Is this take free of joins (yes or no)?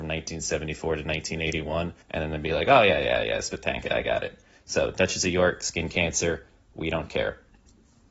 no